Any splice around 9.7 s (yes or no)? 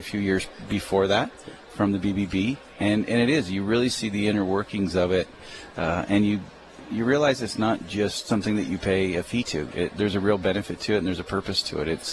no